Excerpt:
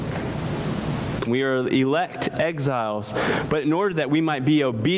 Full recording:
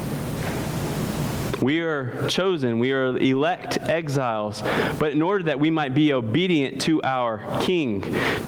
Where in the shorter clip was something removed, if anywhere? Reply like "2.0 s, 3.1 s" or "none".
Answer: 1.3 s